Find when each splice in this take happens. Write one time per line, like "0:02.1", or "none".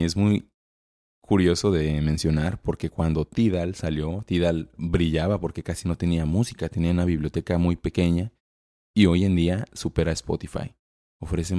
none